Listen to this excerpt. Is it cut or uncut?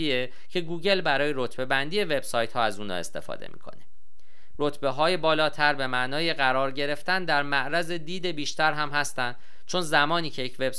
cut